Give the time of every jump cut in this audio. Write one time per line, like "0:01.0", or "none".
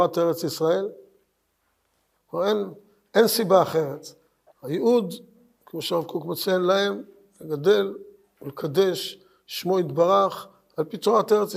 0:02.1
0:04.5